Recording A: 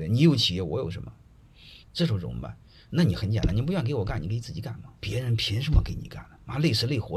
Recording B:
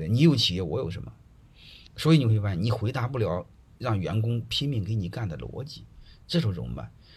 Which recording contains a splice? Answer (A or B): A